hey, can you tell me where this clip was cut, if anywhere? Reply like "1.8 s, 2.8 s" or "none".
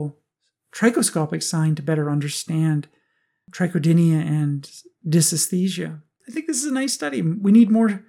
none